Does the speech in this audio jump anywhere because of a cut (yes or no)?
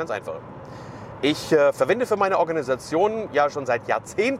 no